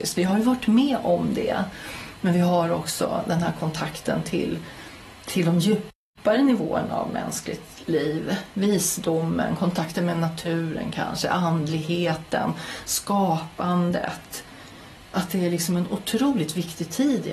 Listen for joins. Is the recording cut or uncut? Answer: uncut